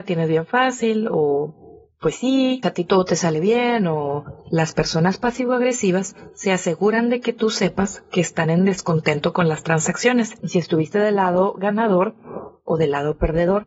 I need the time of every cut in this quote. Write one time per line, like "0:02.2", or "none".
0:02.6
0:10.4